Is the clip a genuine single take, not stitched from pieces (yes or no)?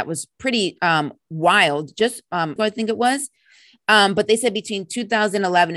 no